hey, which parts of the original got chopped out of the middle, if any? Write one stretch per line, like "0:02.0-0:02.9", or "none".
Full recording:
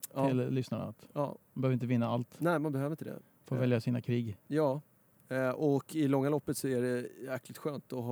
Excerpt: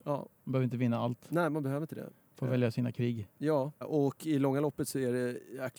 0:04.9-0:05.5